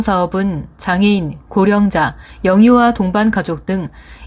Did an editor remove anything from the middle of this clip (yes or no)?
no